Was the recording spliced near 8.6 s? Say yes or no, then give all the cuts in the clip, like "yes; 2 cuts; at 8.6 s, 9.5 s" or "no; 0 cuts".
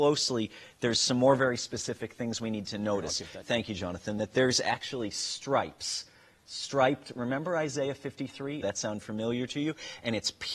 yes; 2 cuts; at 3.4 s, 8.6 s